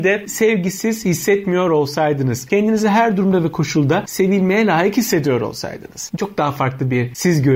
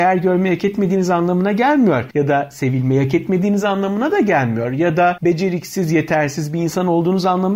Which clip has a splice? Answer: first; 1 cut; at 6.2 s

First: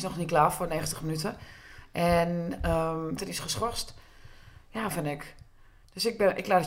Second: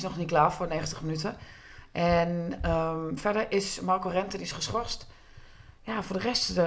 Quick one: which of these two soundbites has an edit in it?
first; 2 cuts; at 3.2 s, 4.9 s

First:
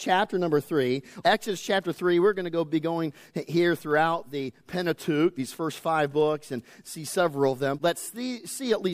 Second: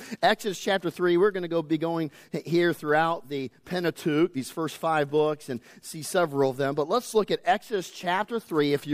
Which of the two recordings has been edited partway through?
first; 2 cuts; at 1.2 s, 7.8 s

